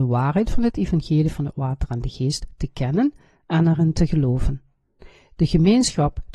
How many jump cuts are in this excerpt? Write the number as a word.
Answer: zero